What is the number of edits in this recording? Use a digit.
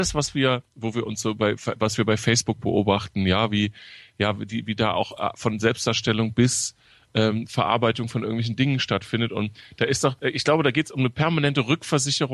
1